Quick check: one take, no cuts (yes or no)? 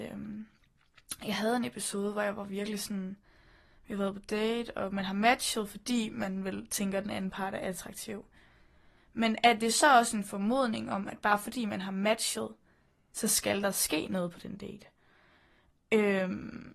yes